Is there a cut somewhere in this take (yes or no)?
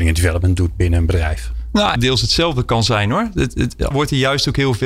yes